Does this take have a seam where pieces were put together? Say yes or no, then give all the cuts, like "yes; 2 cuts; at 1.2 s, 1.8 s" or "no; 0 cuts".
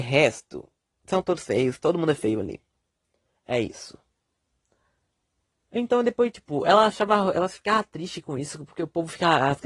no; 0 cuts